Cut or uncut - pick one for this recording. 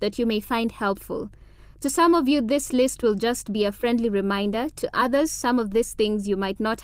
uncut